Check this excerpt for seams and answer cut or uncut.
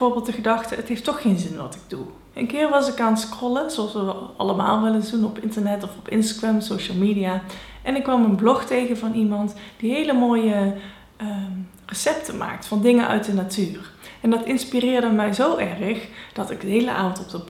cut